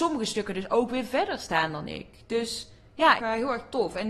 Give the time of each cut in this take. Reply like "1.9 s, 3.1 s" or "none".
3.2 s